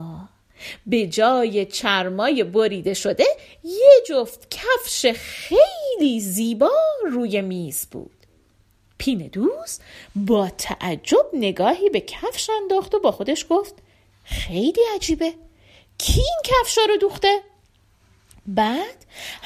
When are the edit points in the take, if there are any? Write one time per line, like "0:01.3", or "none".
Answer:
none

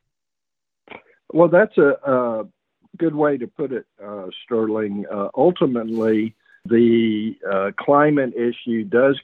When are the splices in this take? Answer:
0:06.7

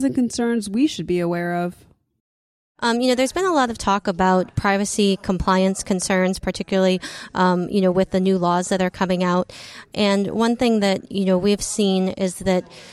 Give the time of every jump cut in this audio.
none

